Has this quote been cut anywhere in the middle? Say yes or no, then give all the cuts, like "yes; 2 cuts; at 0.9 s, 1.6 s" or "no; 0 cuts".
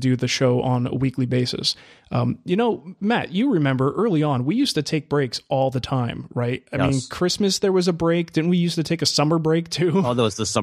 no; 0 cuts